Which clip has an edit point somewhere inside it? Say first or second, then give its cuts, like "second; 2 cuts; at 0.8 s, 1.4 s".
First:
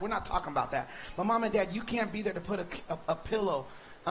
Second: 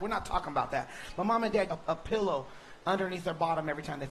second; 1 cut; at 1.7 s